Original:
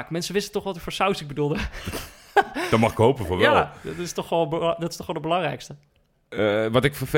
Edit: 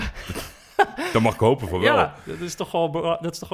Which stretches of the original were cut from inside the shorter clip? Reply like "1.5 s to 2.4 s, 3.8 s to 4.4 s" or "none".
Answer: none